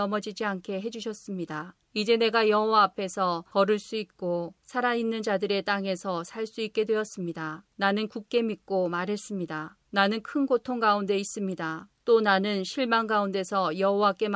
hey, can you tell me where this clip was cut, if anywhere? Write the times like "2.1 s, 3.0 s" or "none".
none